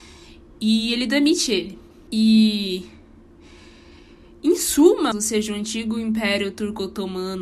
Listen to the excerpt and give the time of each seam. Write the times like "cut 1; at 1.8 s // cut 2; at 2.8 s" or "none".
cut 1; at 2.1 s // cut 2; at 5.1 s